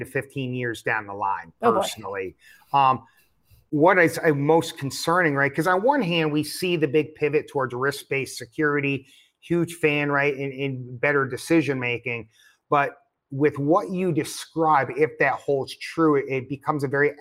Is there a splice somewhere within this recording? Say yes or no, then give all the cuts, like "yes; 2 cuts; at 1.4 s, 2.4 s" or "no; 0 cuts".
no; 0 cuts